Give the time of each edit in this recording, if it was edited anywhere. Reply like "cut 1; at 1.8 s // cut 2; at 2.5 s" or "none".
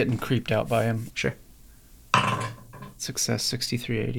cut 1; at 1.1 s